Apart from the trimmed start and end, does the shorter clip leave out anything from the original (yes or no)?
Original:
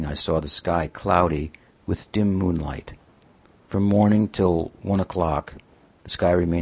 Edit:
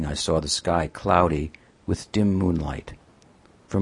no